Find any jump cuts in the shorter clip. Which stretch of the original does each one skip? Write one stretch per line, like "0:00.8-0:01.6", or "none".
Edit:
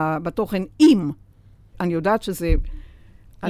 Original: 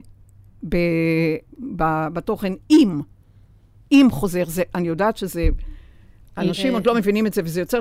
0:03.6-0:04.7